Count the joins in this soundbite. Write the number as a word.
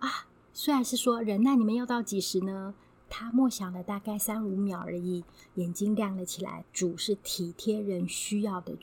two